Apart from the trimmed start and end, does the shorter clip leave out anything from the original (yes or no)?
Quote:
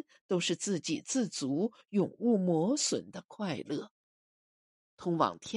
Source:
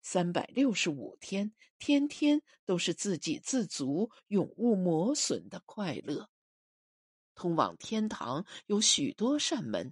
no